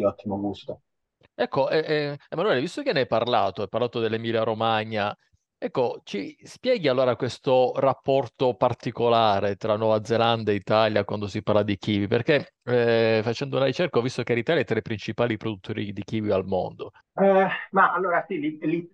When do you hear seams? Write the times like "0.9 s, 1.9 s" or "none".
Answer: 17.0 s